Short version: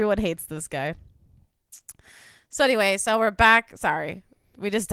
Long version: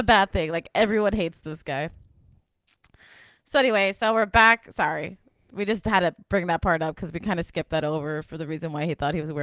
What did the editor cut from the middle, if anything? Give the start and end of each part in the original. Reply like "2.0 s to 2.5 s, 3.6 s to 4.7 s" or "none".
none